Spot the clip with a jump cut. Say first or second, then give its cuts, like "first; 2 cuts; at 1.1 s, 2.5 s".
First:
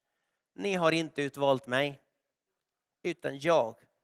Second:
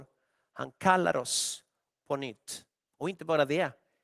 second; 1 cut; at 2.8 s